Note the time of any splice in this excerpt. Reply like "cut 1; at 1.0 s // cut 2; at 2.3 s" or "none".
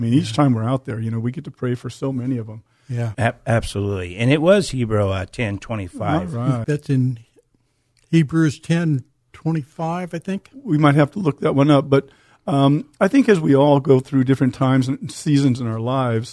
cut 1; at 3.1 s // cut 2; at 6.6 s